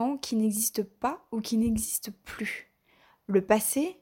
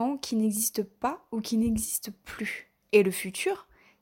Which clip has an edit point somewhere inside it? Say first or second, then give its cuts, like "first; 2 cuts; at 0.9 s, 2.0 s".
second; 1 cut; at 2.8 s